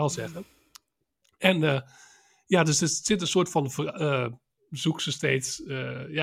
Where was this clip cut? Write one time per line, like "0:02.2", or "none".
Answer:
0:04.6